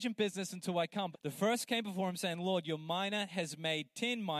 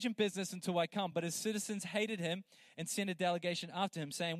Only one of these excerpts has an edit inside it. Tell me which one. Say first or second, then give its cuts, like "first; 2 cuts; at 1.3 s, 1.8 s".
first; 1 cut; at 1.1 s